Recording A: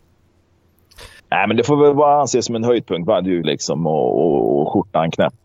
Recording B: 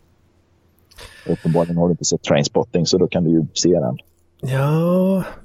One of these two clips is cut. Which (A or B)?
A